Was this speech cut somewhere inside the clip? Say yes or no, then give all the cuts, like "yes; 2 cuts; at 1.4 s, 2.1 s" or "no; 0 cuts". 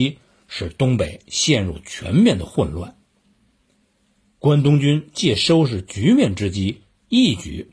no; 0 cuts